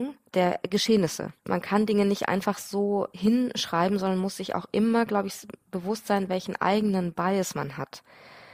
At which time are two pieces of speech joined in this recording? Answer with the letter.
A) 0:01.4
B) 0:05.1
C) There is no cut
A